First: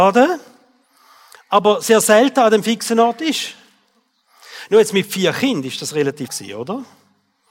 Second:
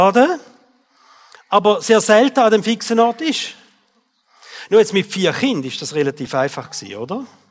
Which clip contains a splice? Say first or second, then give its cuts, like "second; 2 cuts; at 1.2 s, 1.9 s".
first; 1 cut; at 6.3 s